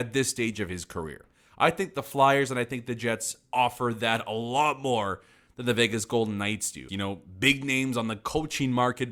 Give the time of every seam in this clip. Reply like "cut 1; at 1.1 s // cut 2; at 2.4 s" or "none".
cut 1; at 6.9 s